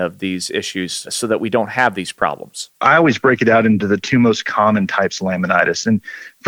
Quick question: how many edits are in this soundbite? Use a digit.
0